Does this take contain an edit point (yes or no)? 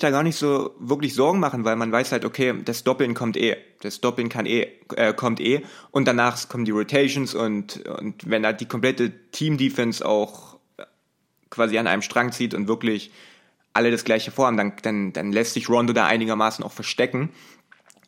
no